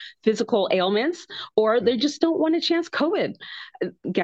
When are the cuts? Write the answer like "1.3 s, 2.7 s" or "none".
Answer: none